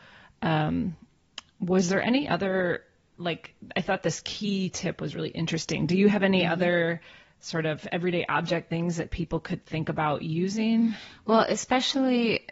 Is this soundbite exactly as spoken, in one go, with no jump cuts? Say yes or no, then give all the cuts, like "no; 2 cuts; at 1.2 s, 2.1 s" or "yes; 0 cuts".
yes; 0 cuts